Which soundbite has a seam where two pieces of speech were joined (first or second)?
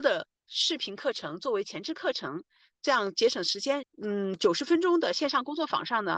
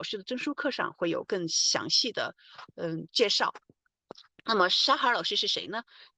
first